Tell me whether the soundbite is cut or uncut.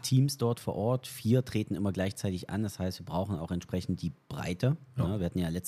uncut